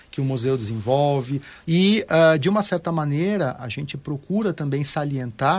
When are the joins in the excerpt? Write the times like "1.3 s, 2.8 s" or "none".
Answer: 1.6 s